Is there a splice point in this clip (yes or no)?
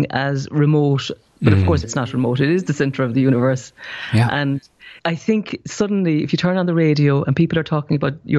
yes